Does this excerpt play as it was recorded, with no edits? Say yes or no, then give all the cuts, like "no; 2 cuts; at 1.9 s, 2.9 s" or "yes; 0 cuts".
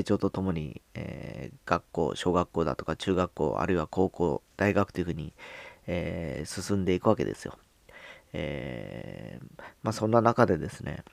yes; 0 cuts